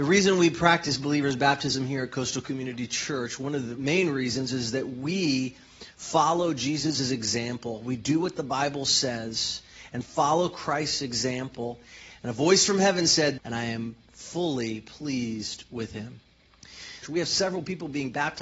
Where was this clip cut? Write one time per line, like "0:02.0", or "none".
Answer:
0:12.1
0:13.4
0:17.0